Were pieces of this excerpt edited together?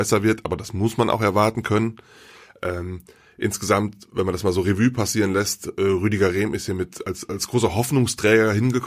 no; 0 cuts

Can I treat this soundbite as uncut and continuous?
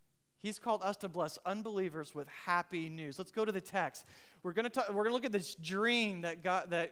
yes; 0 cuts

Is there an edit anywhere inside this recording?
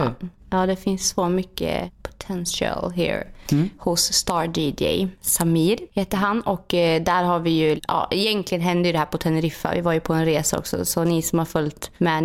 yes; 1 cut; at 3.4 s

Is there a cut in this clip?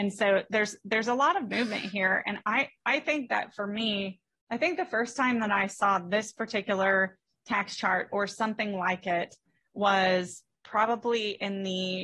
no; 0 cuts

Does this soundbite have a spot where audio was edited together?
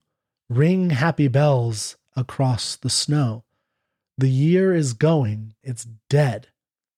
yes; 1 cut; at 5.6 s

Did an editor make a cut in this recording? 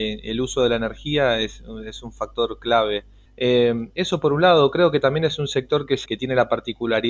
yes; 2 cuts; at 3.3 s, 6.1 s

